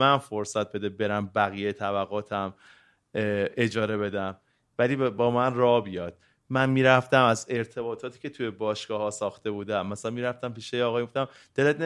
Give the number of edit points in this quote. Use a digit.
0